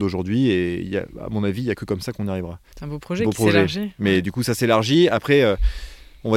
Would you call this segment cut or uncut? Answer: cut